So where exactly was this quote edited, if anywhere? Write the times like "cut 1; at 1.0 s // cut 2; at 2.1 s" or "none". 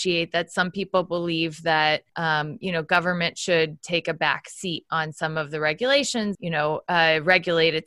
cut 1; at 2.1 s // cut 2; at 6.3 s